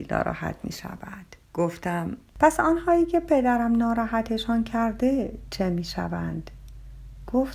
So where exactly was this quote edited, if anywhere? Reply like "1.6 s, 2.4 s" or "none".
1.4 s

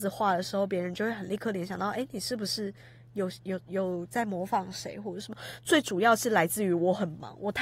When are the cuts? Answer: 5.6 s

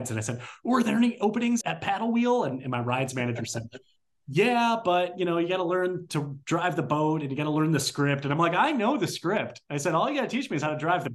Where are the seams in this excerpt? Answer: 1.6 s

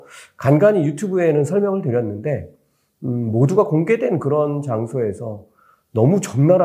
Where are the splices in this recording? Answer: none

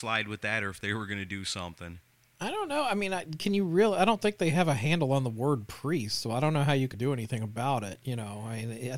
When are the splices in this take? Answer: 6.9 s

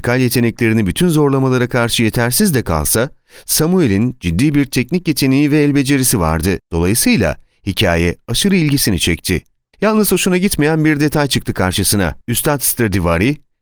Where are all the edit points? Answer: 6.6 s, 9.7 s, 12.2 s

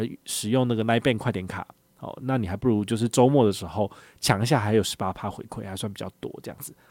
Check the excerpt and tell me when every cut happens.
none

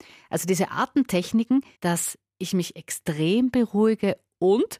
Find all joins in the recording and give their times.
1.7 s

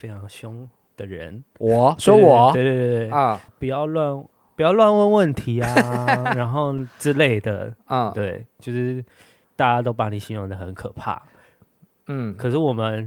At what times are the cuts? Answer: 3.5 s

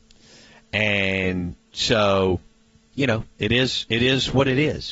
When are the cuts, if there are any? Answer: none

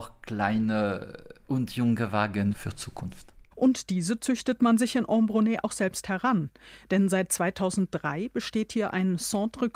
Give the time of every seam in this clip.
3.5 s

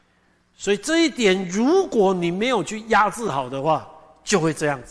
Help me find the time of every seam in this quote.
none

